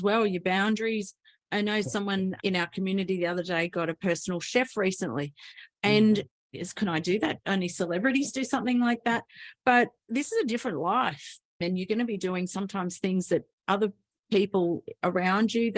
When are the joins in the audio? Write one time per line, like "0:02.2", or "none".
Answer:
0:11.6